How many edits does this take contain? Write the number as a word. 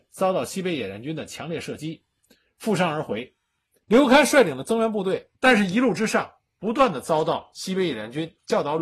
two